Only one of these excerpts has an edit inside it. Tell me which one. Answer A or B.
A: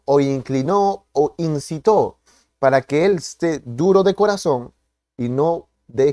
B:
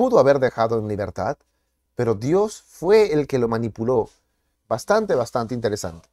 B